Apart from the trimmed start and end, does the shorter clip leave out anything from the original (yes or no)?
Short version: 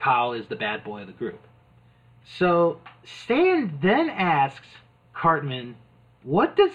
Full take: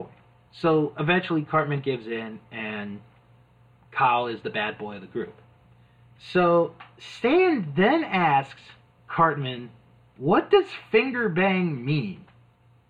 no